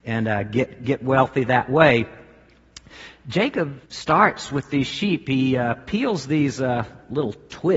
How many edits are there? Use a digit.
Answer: 1